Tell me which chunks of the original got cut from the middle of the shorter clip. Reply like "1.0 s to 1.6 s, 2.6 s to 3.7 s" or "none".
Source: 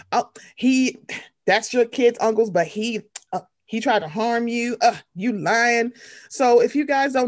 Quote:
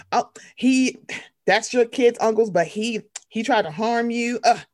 3.2 s to 3.6 s